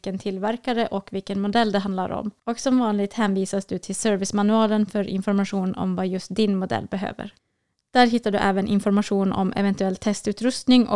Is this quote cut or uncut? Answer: cut